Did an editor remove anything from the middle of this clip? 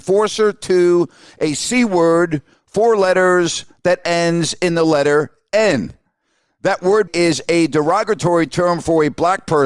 yes; 1 cut; at 7.1 s

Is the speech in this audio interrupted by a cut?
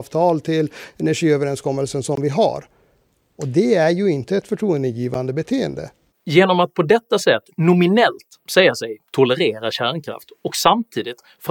yes; 1 cut; at 6.1 s

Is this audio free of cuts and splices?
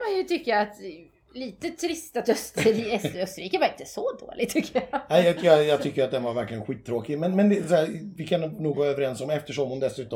yes; 0 cuts

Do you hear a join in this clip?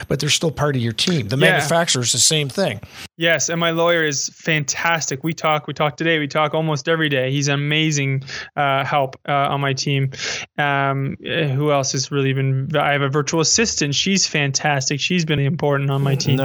yes; 1 cut; at 15.4 s

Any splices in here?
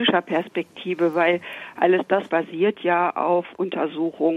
yes; 1 cut; at 2.3 s

